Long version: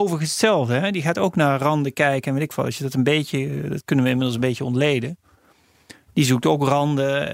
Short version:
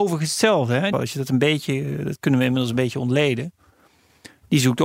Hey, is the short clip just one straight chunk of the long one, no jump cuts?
no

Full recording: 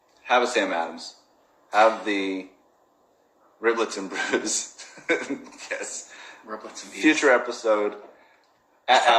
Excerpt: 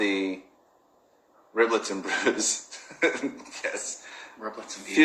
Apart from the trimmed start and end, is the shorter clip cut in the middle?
no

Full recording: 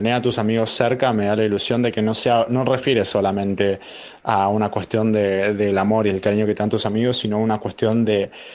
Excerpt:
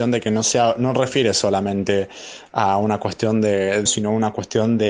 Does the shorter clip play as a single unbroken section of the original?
no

